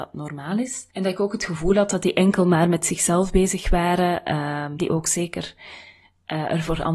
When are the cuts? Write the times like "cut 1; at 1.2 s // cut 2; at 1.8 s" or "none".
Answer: cut 1; at 0.9 s // cut 2; at 4.8 s

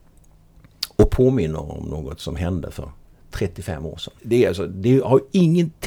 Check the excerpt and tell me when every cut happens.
cut 1; at 4.2 s

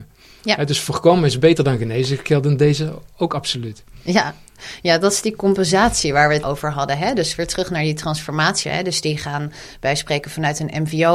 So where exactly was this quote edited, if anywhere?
cut 1; at 6.4 s // cut 2; at 8.6 s

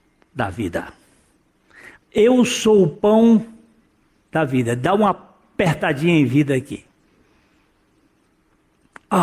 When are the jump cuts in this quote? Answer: cut 1; at 1.9 s

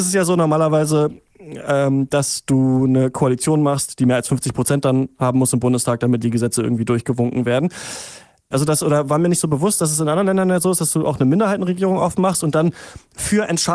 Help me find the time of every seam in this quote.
cut 1; at 8.5 s

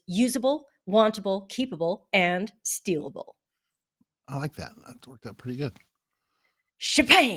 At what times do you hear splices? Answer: none

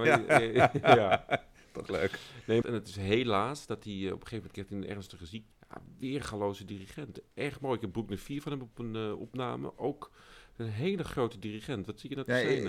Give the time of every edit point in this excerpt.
cut 1; at 2.6 s // cut 2; at 5.5 s // cut 3; at 7.3 s

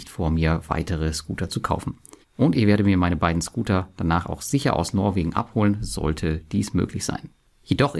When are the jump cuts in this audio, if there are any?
cut 1; at 2.2 s

